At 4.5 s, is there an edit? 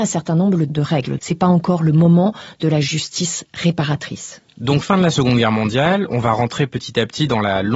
no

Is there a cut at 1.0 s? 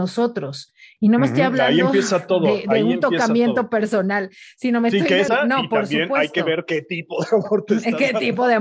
no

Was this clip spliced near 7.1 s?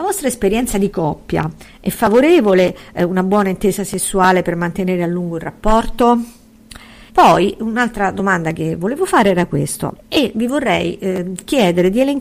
yes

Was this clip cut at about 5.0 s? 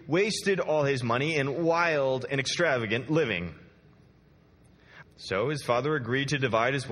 yes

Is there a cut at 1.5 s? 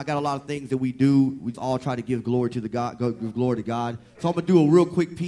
yes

